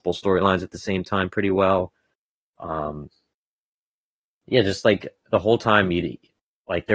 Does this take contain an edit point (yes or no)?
no